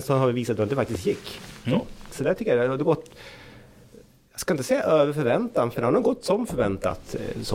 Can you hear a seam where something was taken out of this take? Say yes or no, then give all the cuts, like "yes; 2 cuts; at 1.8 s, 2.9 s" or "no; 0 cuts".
yes; 1 cut; at 2.1 s